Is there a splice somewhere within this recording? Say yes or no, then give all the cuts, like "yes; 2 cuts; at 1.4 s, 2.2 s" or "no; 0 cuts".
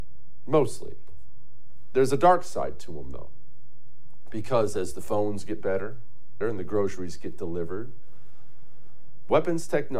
yes; 1 cut; at 6.4 s